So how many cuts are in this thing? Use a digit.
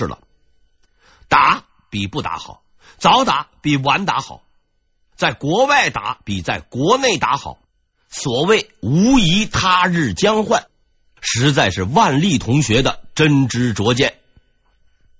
0